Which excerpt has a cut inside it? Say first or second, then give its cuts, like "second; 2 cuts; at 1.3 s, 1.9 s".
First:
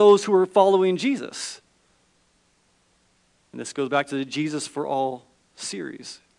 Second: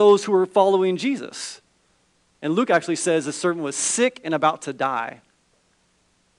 second; 1 cut; at 2.3 s